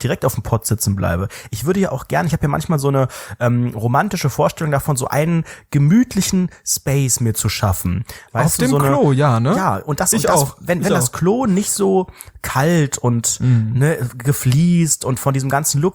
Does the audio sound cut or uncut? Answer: uncut